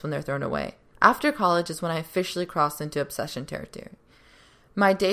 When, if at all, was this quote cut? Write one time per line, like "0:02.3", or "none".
0:00.9